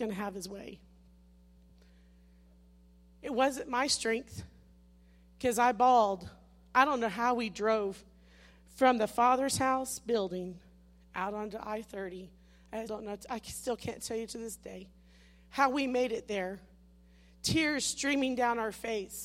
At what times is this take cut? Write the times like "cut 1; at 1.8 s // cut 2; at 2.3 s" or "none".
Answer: cut 1; at 12.9 s